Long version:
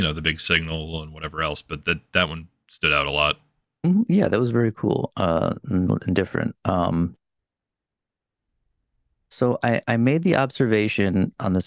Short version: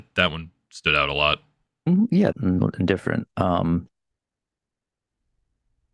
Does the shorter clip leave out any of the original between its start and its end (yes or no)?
yes